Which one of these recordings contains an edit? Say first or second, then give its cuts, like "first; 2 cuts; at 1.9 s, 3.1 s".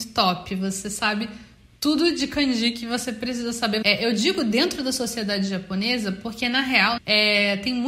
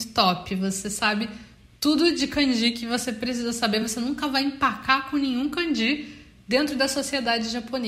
first; 2 cuts; at 3.8 s, 7.0 s